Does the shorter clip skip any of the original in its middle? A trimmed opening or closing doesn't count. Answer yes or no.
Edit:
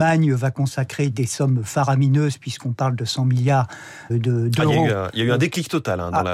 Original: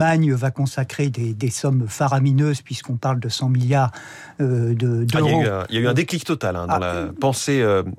yes